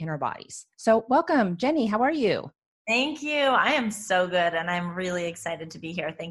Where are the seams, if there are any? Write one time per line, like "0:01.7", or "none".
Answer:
none